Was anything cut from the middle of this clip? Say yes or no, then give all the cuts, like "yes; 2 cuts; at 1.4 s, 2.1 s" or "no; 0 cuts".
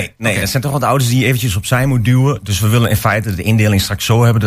no; 0 cuts